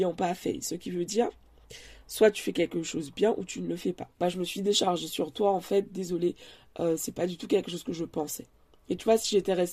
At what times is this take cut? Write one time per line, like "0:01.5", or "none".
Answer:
0:04.1

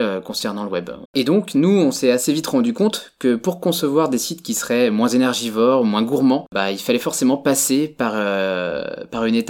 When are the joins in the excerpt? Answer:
0:01.1

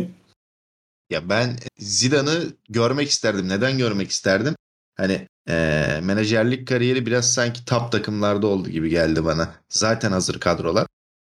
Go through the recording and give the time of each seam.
0:01.7
0:05.4

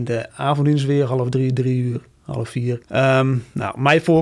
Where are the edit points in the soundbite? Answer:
none

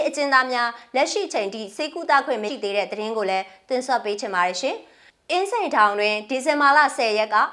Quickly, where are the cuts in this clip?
0:02.5

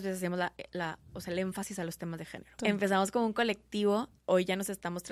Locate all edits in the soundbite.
0:02.6
0:04.2

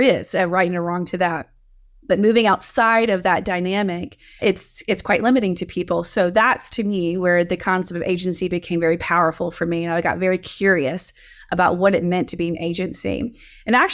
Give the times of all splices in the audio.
0:04.4

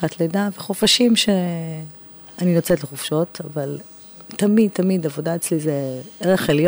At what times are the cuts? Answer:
none

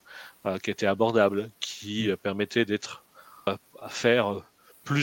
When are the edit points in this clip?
0:03.5

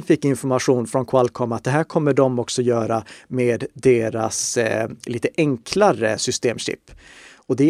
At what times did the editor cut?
none

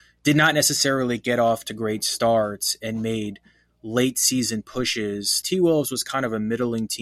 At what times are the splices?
0:05.4

